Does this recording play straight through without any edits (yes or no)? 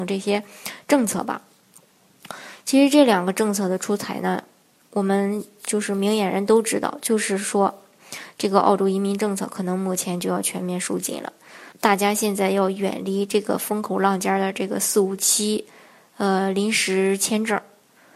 no